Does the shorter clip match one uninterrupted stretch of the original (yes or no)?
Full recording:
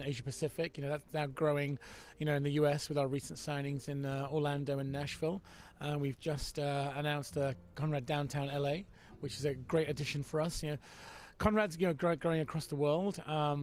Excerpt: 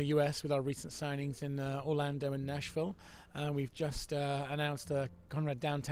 yes